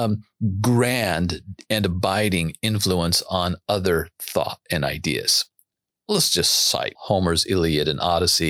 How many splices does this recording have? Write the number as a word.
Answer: two